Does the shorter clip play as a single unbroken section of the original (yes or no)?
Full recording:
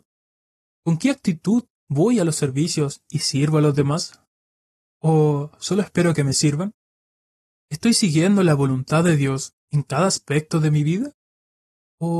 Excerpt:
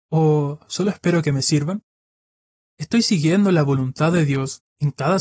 yes